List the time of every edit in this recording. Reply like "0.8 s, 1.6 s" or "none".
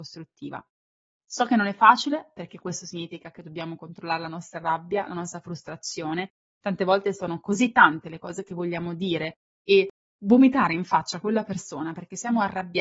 none